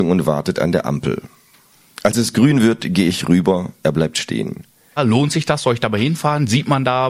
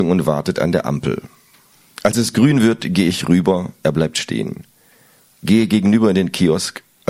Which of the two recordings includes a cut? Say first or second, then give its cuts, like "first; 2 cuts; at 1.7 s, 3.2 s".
first; 1 cut; at 5.0 s